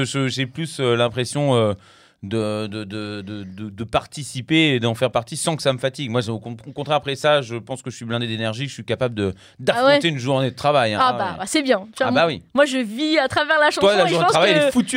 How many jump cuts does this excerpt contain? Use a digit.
0